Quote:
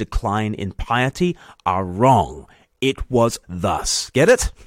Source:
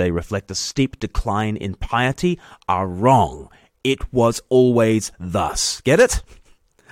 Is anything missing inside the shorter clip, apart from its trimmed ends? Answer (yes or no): yes